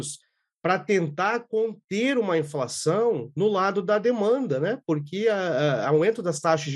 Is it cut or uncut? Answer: uncut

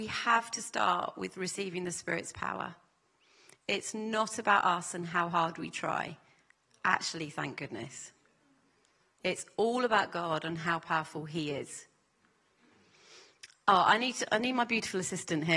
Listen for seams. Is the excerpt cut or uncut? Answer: uncut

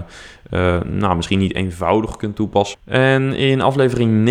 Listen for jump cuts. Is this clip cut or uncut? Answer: cut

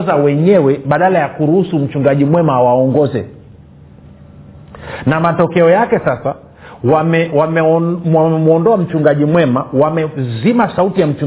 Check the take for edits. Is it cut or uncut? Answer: uncut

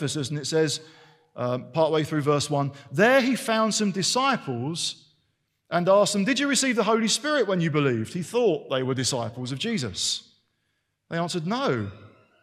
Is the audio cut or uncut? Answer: uncut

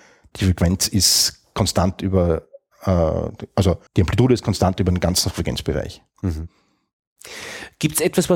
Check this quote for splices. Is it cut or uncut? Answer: cut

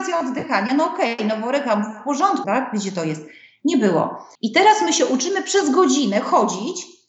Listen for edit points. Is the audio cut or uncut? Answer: cut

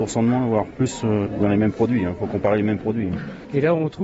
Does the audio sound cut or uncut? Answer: uncut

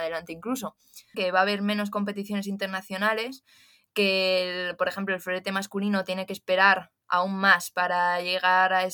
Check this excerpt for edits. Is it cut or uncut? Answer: cut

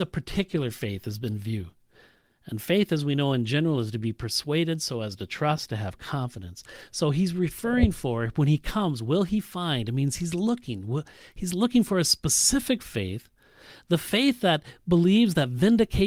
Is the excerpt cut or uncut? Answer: uncut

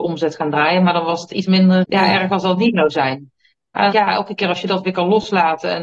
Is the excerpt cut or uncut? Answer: cut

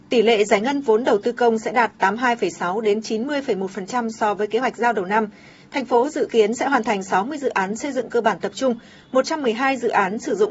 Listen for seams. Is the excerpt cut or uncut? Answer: uncut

